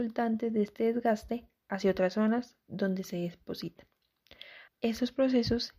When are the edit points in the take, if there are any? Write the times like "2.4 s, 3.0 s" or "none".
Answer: 4.7 s